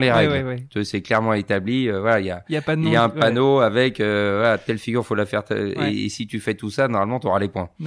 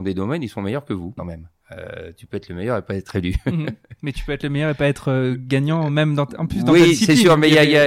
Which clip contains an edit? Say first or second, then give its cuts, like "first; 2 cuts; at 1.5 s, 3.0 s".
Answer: second; 1 cut; at 1.2 s